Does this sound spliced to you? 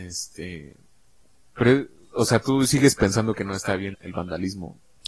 yes; 1 cut; at 3.9 s

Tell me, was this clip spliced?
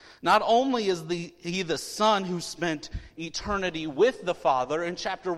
no; 0 cuts

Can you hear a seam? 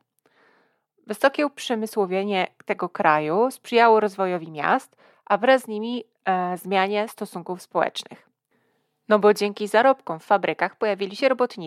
no; 0 cuts

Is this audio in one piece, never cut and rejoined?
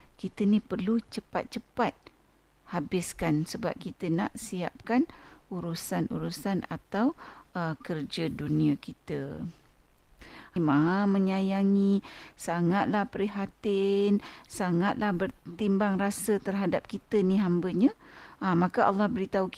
no; 1 cut; at 10.6 s

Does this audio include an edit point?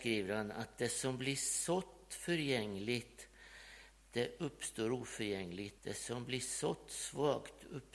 yes; 1 cut; at 5.8 s

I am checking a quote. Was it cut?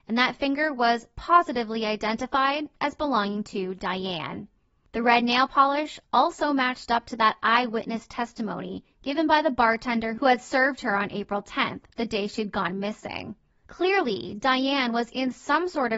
yes; 1 cut; at 13.5 s

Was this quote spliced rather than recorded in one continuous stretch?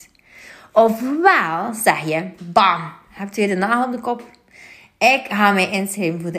yes; 1 cut; at 2.4 s

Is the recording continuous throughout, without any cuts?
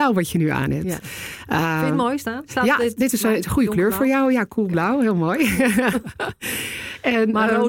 yes; 0 cuts

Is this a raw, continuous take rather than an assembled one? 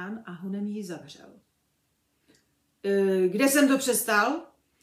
yes; 0 cuts

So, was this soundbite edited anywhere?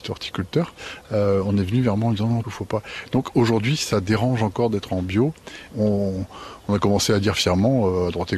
yes; 2 cuts; at 2.4 s, 5.7 s

